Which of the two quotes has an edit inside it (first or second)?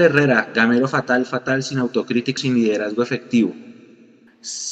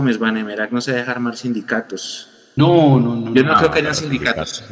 first